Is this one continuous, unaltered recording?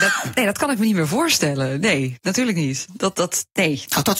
yes; 0 cuts

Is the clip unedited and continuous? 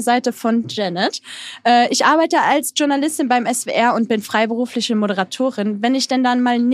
yes; 0 cuts

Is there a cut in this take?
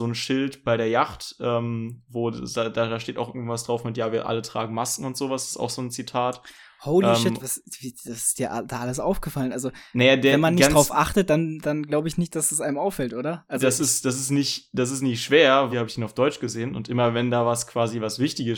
yes; 2 cuts; at 7.4 s, 15.7 s

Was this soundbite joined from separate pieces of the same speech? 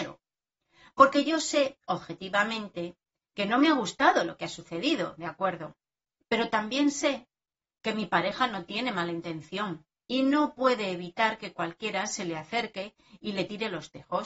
yes; 1 cut; at 10.0 s

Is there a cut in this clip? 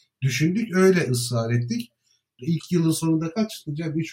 yes; 1 cut; at 2.4 s

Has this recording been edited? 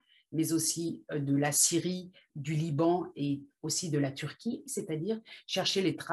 yes; 2 cuts; at 2.3 s, 4.7 s

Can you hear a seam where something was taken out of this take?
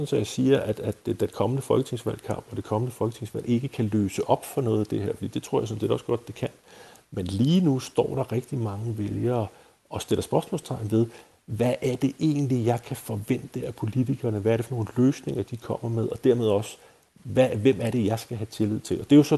no; 0 cuts

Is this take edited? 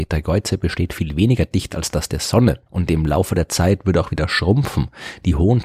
yes; 1 cut; at 2.7 s

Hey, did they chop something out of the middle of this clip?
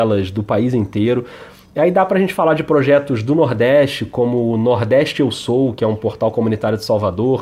no; 0 cuts

